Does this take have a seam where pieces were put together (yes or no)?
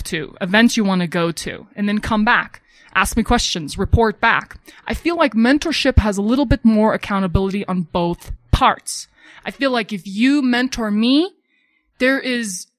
no